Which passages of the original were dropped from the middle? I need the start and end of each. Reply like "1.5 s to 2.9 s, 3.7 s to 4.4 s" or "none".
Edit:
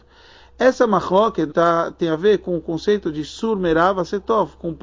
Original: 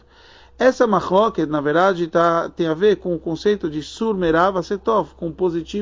1.5 s to 2.1 s